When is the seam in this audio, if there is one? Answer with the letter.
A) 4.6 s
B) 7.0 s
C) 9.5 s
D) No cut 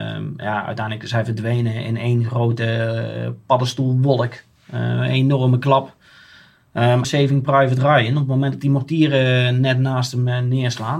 B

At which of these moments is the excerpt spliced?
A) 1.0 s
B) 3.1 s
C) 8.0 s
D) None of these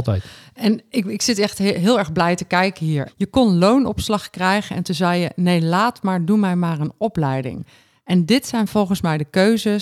B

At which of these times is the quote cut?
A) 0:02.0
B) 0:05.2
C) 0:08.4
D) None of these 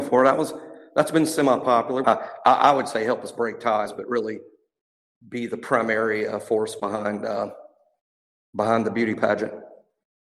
A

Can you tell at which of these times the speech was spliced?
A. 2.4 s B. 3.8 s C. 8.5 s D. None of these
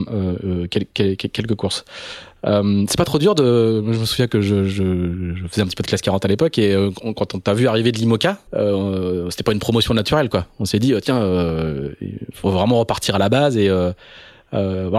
C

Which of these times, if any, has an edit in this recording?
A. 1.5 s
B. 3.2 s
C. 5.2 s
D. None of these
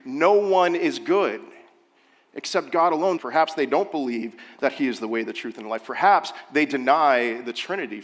B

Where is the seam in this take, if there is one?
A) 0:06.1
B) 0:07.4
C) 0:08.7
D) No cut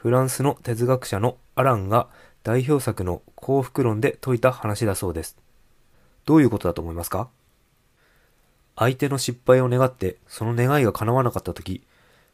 A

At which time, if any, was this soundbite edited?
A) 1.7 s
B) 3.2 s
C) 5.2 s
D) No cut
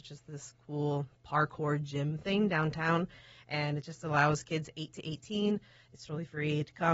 D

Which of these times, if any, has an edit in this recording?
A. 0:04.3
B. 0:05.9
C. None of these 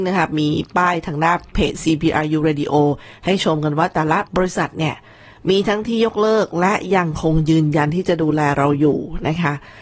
A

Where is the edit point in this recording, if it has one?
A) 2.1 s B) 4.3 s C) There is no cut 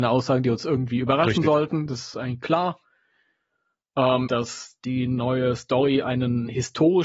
B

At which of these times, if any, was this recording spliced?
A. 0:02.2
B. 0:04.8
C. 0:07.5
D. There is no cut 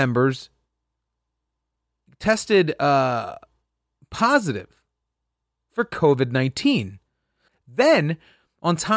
C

